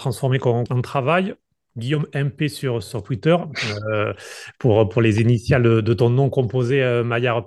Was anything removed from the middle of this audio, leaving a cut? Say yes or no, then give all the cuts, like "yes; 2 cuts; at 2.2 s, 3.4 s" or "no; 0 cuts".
no; 0 cuts